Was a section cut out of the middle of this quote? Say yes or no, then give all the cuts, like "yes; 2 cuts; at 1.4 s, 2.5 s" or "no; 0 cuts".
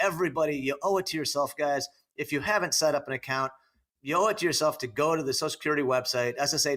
no; 0 cuts